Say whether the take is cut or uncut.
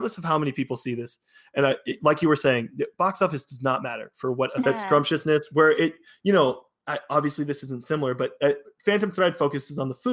cut